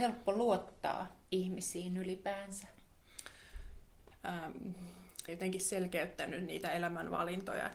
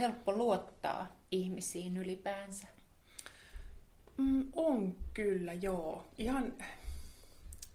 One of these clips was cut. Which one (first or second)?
first